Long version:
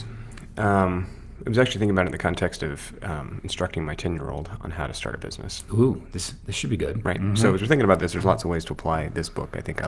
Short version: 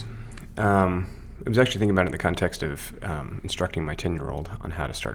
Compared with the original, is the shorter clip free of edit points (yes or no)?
yes